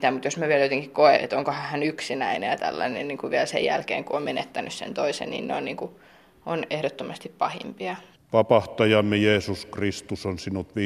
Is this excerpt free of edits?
no; 2 cuts; at 1.2 s, 8.1 s

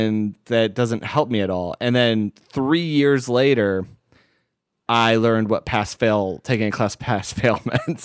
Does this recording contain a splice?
no; 0 cuts

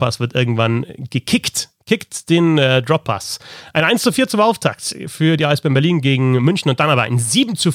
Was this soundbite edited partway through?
no; 0 cuts

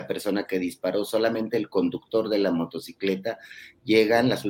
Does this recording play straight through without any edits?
yes; 0 cuts

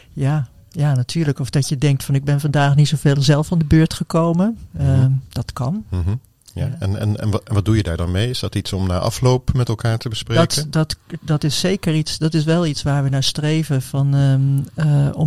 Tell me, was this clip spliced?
no; 0 cuts

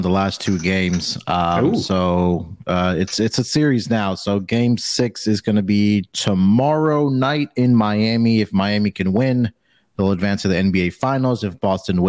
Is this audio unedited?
yes; 0 cuts

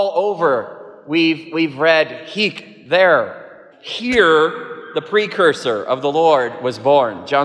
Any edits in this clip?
yes; 1 cut; at 3.7 s

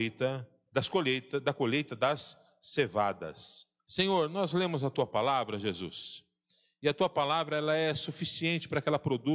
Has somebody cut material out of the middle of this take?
yes; 1 cut; at 3.8 s

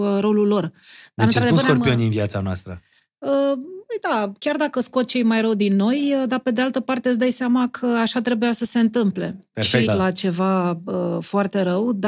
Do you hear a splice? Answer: yes; 1 cut; at 9.9 s

